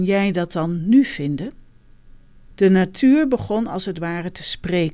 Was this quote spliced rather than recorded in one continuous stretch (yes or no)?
yes